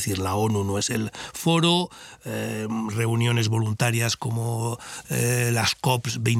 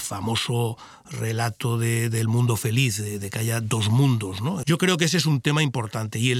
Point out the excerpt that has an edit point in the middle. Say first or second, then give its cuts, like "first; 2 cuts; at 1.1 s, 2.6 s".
second; 1 cut; at 4.6 s